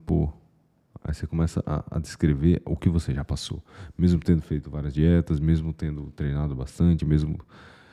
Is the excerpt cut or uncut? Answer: uncut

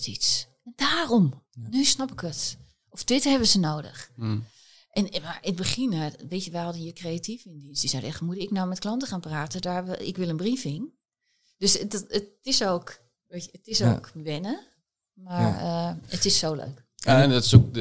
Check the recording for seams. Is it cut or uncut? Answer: uncut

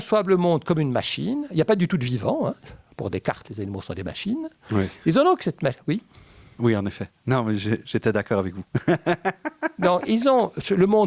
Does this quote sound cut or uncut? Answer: uncut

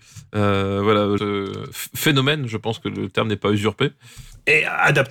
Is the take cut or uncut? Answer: cut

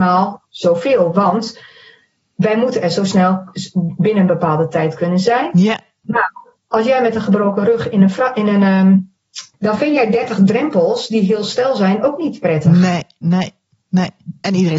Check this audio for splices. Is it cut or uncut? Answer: cut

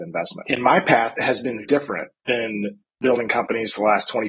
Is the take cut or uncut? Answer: cut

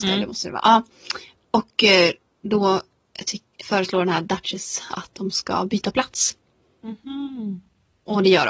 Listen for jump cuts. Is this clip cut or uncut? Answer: cut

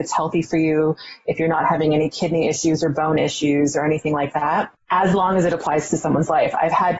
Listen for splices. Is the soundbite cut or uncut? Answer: uncut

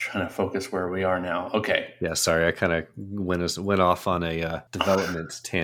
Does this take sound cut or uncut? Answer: cut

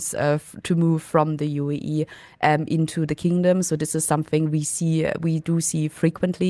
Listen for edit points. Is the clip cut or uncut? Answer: uncut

